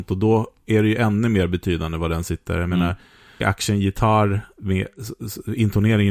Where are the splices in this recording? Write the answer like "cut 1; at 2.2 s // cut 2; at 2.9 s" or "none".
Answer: cut 1; at 3.4 s